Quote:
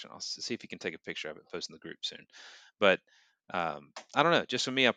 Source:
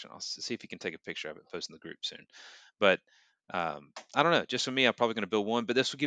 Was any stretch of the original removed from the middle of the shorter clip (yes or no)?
no